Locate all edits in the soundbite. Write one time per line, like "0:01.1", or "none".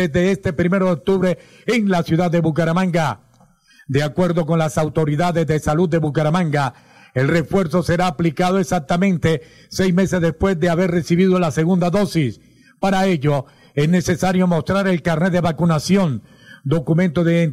none